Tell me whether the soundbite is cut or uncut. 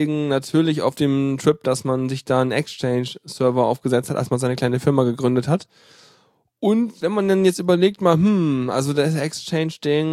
uncut